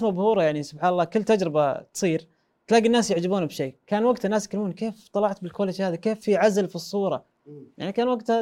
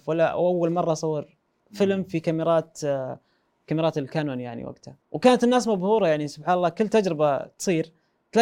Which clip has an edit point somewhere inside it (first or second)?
second